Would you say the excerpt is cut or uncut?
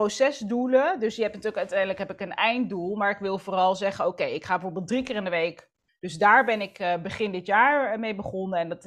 cut